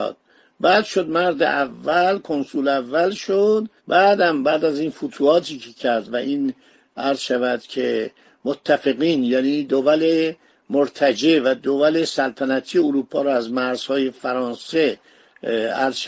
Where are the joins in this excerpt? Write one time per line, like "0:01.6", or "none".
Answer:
0:03.8